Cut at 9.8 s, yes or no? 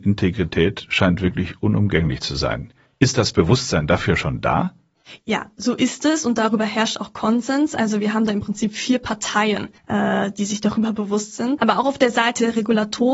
yes